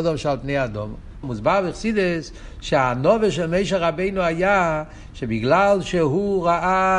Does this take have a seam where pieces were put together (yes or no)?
yes